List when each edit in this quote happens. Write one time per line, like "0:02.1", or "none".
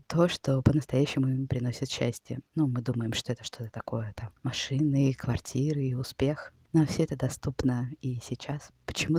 0:06.7